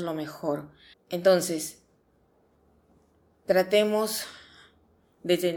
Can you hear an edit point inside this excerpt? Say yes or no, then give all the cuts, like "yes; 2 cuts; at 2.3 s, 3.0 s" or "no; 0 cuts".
yes; 1 cut; at 0.9 s